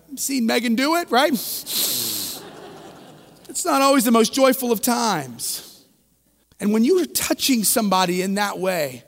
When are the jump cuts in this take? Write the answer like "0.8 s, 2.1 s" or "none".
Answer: 6.4 s